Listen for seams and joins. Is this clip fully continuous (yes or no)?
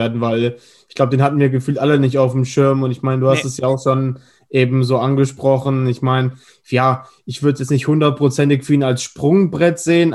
yes